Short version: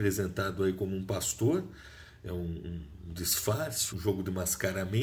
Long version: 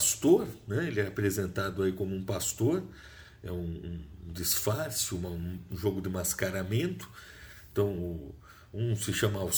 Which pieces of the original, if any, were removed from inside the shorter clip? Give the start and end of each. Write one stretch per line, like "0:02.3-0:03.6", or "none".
0:05.1-0:05.7